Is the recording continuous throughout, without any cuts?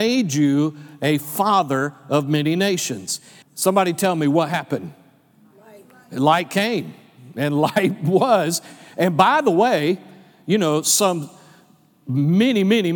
no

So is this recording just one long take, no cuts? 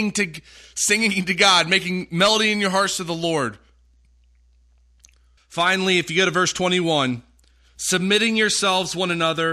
no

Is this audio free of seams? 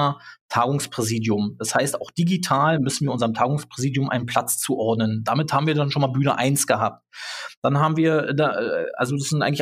yes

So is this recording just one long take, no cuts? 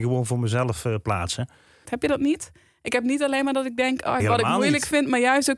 no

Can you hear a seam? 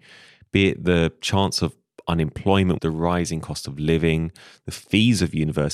yes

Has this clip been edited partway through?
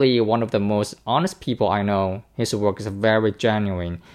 no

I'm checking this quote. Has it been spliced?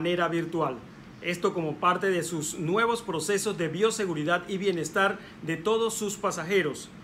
no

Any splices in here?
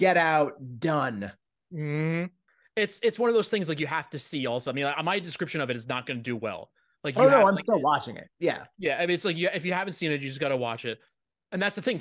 no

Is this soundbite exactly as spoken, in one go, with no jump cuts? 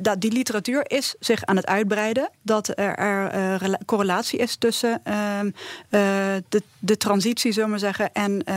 yes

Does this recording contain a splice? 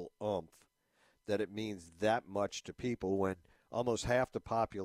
no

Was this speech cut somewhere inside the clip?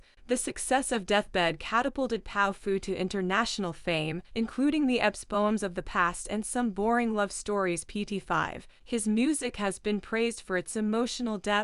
yes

